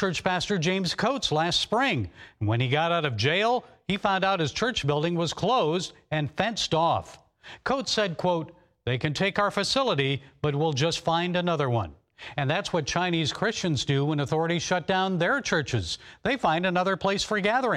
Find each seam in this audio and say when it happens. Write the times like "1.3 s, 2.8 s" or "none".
none